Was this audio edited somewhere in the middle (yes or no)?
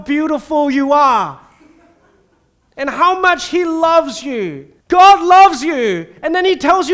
yes